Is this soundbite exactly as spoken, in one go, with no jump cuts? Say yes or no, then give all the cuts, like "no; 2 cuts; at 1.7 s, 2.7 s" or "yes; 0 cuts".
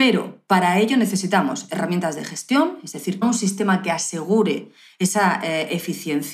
no; 1 cut; at 3.2 s